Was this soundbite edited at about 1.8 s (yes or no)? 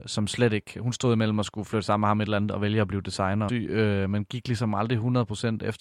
no